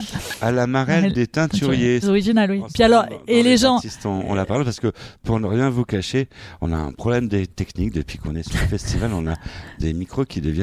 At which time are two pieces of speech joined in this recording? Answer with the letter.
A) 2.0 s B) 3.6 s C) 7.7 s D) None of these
A